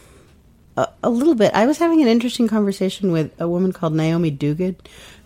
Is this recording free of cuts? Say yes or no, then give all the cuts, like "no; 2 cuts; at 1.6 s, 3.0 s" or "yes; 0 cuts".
yes; 0 cuts